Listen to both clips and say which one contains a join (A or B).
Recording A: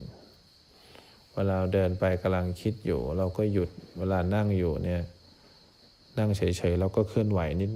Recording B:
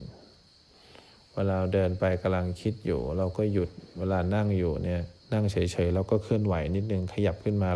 B